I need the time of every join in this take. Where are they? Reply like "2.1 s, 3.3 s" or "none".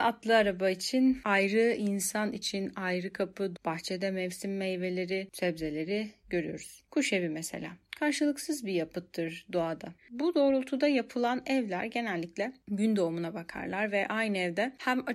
3.6 s, 10.0 s